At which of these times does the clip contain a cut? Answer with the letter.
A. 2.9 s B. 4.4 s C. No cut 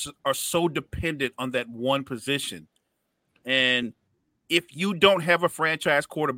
C